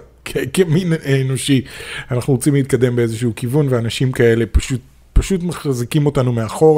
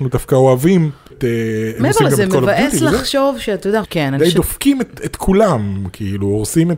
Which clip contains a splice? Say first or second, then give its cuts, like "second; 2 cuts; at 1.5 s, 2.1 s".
second; 2 cuts; at 1.1 s, 3.8 s